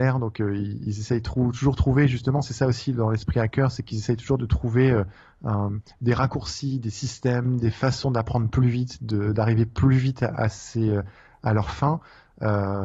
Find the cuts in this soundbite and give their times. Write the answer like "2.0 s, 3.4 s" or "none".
none

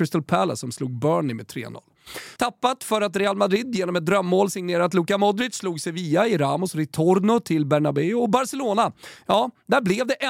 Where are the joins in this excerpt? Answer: 2.4 s

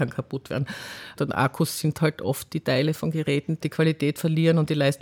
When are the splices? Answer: 1.2 s, 3.6 s

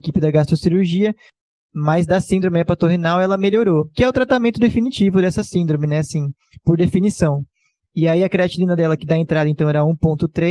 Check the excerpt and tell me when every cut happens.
none

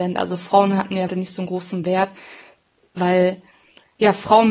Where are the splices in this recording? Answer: 1.1 s

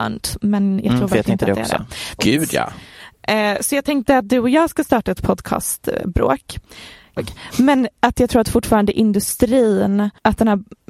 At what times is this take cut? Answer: 2.2 s, 7.2 s

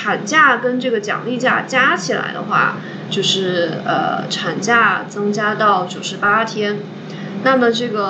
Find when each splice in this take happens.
3.1 s

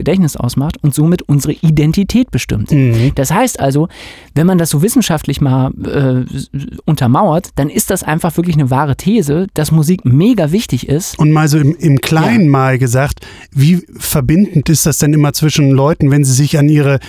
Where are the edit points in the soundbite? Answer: none

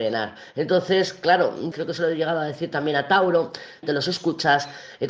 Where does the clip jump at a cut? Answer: 1.7 s, 3.8 s

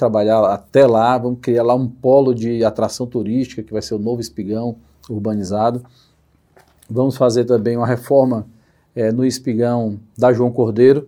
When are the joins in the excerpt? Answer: none

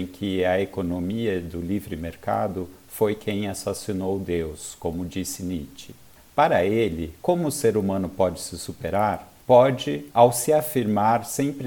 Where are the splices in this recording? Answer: 9.4 s

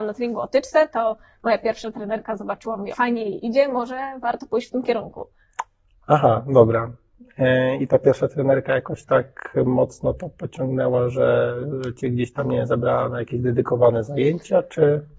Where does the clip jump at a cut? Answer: 2.9 s

